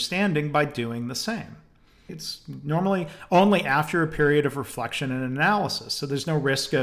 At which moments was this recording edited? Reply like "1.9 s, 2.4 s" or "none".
2.1 s